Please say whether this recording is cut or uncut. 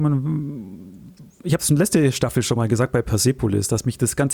uncut